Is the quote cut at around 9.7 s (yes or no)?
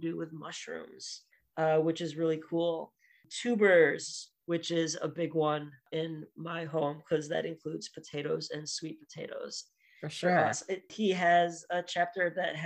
yes